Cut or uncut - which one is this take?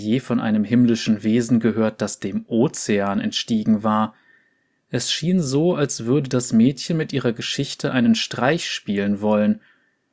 uncut